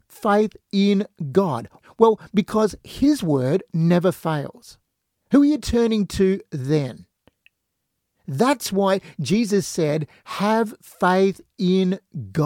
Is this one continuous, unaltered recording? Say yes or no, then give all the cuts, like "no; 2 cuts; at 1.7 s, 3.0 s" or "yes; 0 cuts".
no; 2 cuts; at 1.8 s, 5.1 s